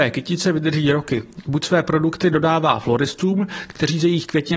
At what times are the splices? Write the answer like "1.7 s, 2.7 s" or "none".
1.4 s